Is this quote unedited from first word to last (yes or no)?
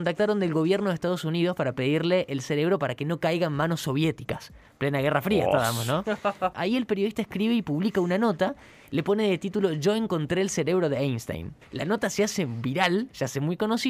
no